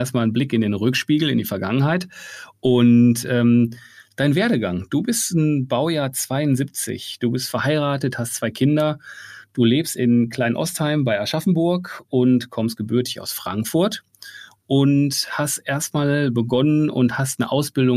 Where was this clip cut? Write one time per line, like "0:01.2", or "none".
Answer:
none